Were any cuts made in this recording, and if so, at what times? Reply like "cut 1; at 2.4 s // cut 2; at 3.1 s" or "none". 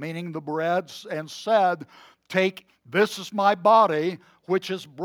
cut 1; at 2.7 s